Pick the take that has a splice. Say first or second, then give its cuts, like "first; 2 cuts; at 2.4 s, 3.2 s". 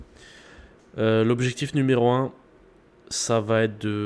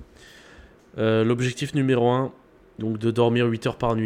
second; 1 cut; at 2.8 s